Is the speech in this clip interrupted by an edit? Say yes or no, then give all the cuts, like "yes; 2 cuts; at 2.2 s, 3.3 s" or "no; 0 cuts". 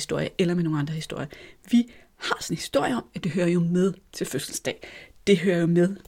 no; 0 cuts